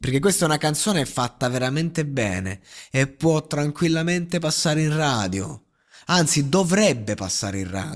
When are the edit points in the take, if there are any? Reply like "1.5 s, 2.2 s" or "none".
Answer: none

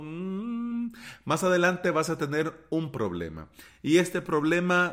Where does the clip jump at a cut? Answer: none

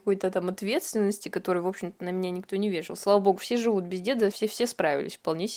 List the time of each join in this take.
4.3 s

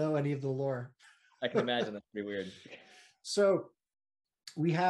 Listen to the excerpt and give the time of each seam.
none

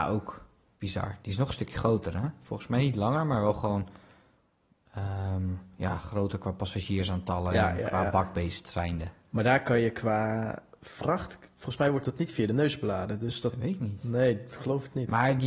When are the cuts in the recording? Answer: none

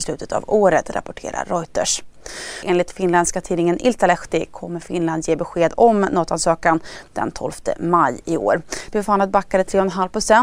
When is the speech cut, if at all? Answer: 2.6 s, 8.9 s

